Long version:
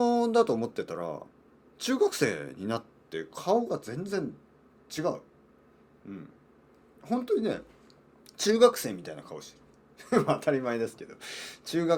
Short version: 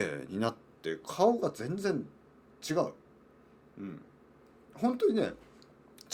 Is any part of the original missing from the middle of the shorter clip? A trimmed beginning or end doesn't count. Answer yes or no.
no